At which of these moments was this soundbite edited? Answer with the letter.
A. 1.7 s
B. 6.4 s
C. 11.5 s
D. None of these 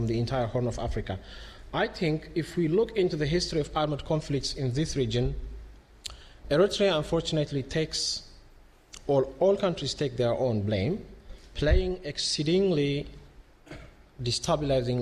C